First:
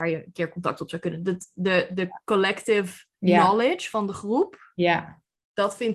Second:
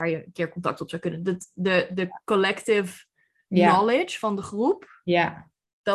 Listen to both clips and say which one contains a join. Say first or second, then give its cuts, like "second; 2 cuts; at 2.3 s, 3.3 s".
first; 1 cut; at 3.1 s